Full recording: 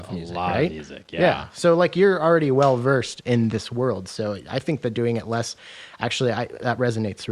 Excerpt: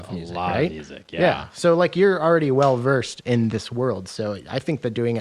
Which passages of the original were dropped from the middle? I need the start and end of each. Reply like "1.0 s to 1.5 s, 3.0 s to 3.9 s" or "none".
none